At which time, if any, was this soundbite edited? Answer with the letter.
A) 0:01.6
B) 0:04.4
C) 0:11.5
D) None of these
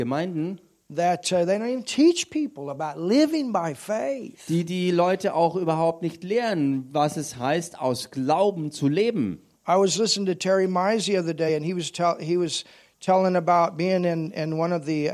D